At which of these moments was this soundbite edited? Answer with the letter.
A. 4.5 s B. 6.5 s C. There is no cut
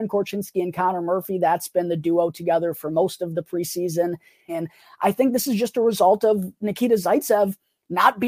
A